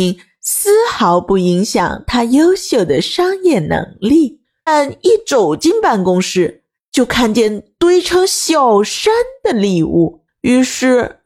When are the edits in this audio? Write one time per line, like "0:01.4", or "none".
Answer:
0:04.7